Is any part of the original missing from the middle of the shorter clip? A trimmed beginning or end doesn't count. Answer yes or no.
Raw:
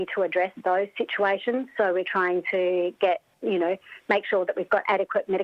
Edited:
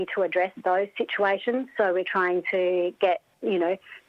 no